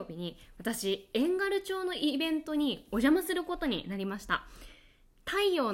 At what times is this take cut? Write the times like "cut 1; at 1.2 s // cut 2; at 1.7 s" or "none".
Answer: none